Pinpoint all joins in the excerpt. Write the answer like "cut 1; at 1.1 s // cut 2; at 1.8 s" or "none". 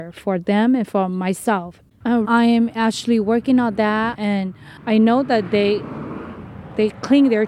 cut 1; at 2.2 s // cut 2; at 4.1 s